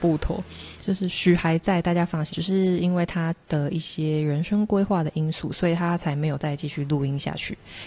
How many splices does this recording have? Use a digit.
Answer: 1